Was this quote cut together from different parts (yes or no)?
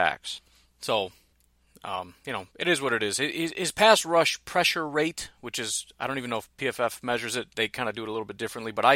no